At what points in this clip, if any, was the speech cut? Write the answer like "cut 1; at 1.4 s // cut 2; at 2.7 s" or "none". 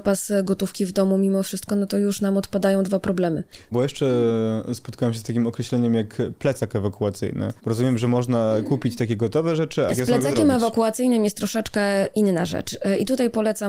cut 1; at 7.6 s // cut 2; at 9.9 s